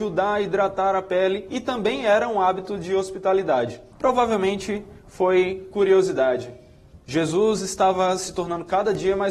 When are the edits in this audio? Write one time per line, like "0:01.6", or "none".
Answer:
0:03.9

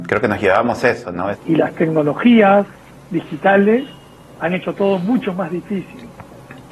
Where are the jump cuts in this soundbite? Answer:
0:01.3

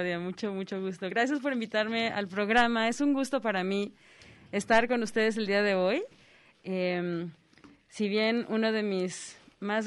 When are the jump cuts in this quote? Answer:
none

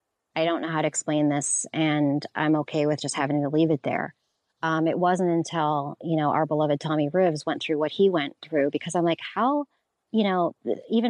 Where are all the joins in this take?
none

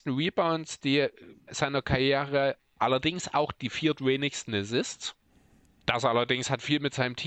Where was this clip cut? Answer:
0:01.5

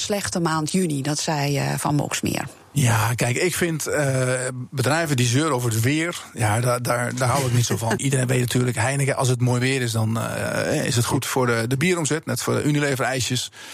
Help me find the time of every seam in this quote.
0:08.0

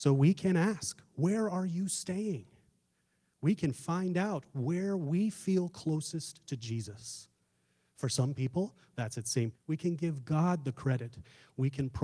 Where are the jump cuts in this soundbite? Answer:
0:09.5

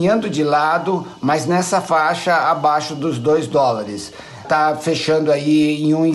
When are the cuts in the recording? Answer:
0:04.4

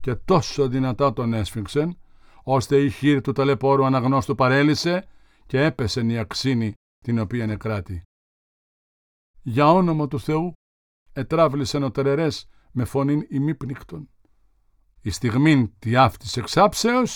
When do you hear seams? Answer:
0:09.3
0:14.9

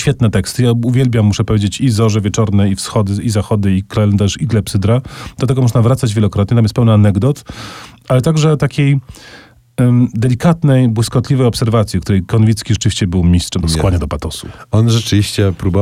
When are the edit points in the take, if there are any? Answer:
0:13.6

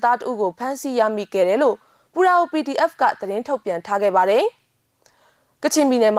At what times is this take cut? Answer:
none

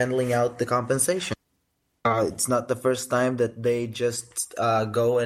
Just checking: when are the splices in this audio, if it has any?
none

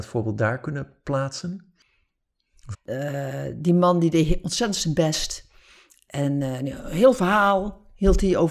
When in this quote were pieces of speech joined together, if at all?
0:02.7

